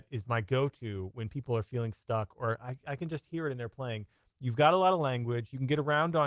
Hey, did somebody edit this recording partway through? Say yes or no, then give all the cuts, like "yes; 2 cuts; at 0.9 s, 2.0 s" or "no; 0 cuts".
no; 0 cuts